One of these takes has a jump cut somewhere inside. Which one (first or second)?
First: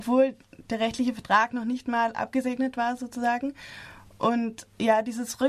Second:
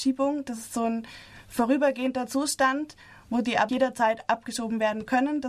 second